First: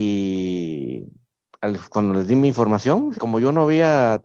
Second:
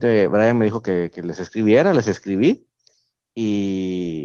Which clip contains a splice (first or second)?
first